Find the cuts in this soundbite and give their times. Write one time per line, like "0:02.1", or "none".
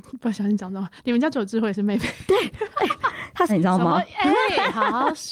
0:03.5